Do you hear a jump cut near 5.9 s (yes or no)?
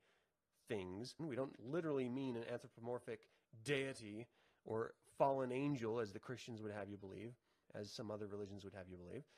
no